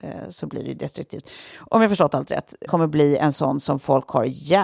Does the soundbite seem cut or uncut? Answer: cut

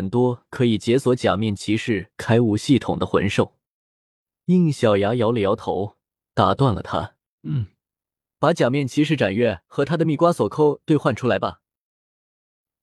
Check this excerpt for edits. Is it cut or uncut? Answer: cut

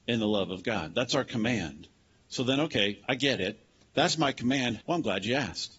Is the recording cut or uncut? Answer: cut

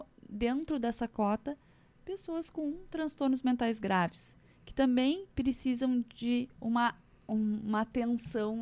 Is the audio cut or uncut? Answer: cut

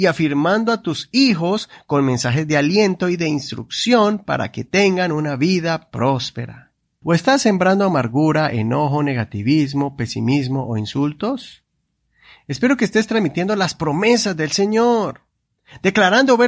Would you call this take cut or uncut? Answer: cut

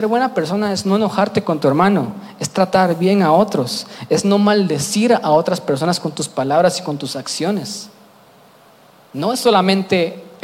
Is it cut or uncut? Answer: uncut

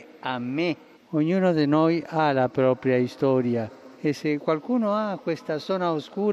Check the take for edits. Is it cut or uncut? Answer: cut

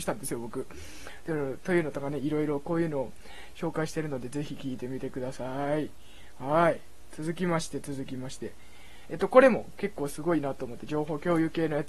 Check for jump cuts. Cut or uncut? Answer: uncut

